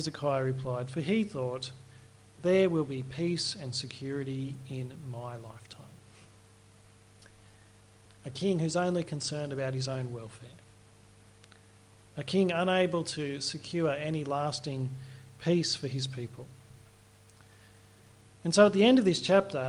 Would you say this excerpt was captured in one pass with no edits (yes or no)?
no